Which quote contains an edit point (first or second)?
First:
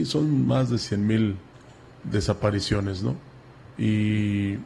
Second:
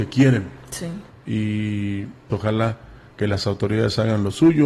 second